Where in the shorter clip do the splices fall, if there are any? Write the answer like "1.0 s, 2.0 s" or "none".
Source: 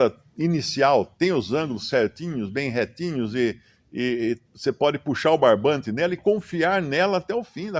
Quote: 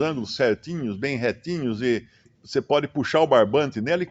2.3 s